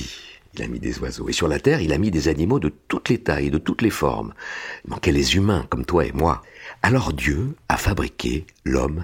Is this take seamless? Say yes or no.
no